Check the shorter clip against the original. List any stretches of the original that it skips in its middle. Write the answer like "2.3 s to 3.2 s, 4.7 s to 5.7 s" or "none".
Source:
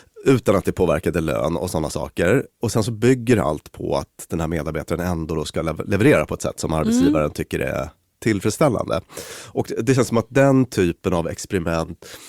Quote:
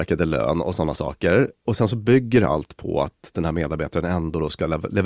none